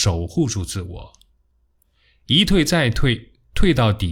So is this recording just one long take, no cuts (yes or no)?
yes